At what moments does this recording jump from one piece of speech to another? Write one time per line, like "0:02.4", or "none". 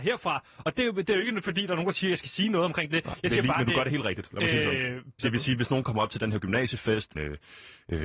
0:05.2
0:07.1